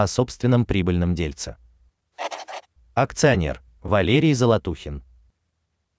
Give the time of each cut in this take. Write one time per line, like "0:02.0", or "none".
0:03.8